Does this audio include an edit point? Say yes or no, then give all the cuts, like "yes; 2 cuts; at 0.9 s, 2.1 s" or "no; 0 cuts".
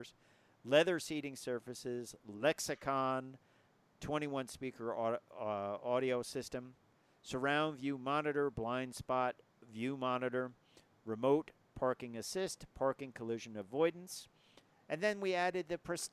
no; 0 cuts